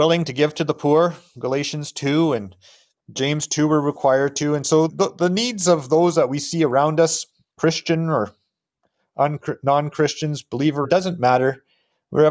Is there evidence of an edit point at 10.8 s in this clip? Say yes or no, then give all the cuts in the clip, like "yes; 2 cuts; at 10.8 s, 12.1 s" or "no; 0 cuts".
yes; 2 cuts; at 4.9 s, 10.8 s